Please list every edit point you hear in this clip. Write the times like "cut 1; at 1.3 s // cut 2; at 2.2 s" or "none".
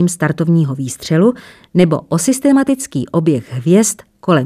none